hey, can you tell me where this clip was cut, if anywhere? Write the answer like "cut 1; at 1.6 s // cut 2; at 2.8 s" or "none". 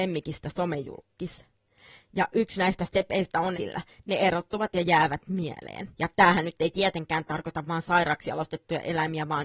cut 1; at 3.5 s // cut 2; at 5.9 s